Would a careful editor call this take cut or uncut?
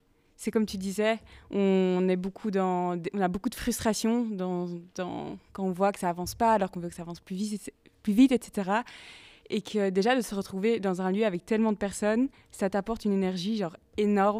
uncut